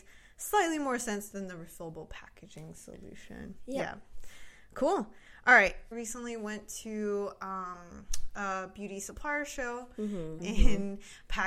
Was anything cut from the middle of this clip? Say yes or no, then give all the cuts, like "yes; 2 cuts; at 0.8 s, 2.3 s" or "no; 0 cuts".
yes; 2 cuts; at 5.9 s, 10.4 s